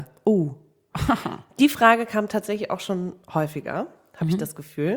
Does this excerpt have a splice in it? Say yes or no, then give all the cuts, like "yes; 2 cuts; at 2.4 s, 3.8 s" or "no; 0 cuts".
no; 0 cuts